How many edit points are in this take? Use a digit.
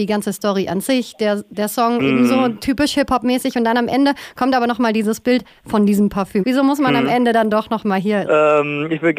2